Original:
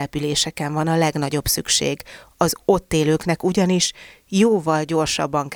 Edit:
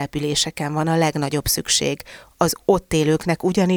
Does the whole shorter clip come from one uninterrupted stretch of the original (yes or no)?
yes